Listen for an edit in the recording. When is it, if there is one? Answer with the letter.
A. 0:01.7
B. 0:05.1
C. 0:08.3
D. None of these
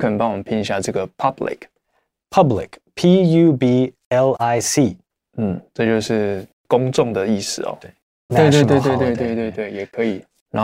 C